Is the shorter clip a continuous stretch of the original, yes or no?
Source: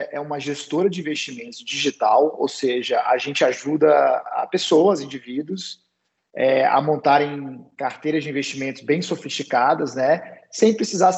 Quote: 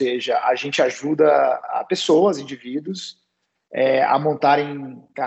yes